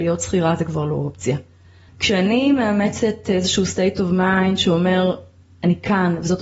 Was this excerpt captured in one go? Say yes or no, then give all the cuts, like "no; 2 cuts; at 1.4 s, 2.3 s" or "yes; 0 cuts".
no; 1 cut; at 1.9 s